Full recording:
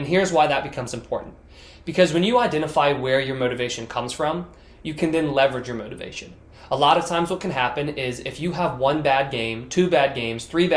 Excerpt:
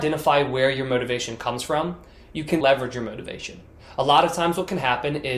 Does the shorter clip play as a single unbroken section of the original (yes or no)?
no